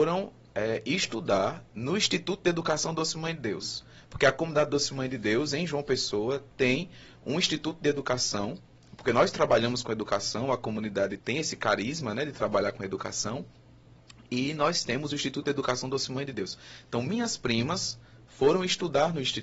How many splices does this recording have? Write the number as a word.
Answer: one